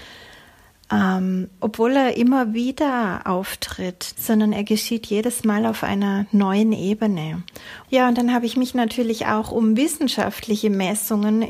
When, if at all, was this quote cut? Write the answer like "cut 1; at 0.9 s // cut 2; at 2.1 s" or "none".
cut 1; at 1.6 s // cut 2; at 4.1 s // cut 3; at 7.8 s